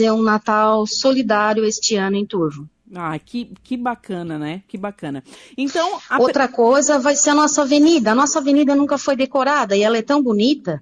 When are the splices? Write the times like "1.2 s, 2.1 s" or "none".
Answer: none